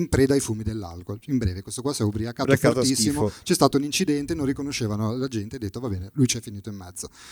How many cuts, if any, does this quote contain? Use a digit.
0